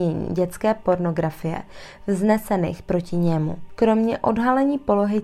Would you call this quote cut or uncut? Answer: uncut